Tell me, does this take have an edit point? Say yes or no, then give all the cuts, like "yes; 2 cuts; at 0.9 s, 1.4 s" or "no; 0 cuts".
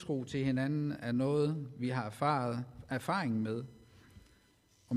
no; 0 cuts